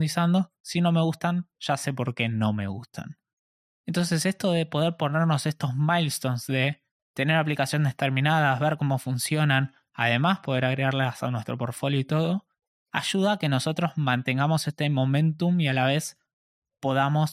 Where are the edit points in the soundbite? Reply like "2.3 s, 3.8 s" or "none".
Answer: none